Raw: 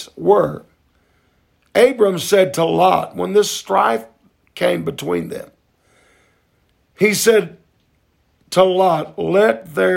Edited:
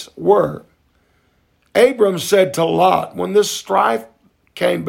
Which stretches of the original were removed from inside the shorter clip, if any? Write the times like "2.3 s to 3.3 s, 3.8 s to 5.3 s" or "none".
none